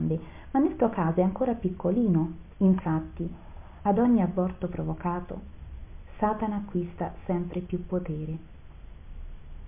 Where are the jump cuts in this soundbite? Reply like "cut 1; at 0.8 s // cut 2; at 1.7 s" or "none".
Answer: cut 1; at 2.5 s